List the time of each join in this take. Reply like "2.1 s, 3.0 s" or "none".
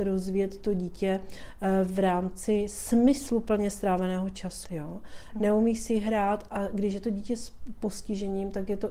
4.6 s